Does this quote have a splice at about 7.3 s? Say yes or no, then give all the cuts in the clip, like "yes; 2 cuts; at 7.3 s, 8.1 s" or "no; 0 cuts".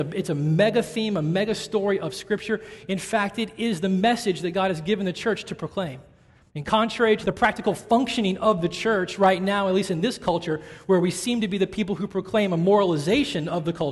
yes; 1 cut; at 7.3 s